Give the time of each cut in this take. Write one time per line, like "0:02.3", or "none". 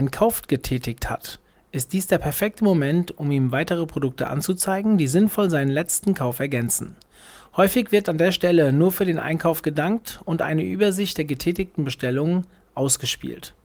none